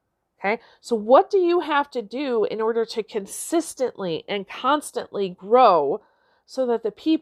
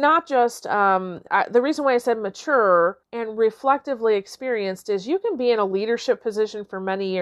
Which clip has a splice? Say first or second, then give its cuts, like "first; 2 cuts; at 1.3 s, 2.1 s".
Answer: second; 2 cuts; at 1.3 s, 3.0 s